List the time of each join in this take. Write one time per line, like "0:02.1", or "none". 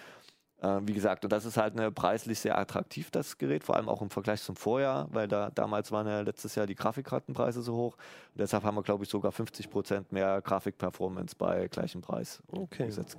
none